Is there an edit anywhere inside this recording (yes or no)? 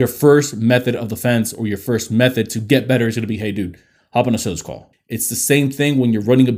yes